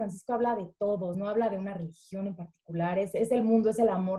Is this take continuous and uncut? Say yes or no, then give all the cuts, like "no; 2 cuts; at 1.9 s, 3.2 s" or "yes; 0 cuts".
yes; 0 cuts